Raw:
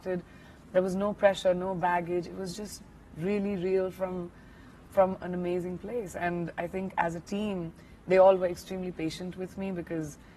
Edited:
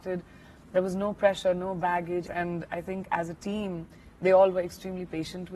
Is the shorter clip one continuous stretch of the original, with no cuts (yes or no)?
no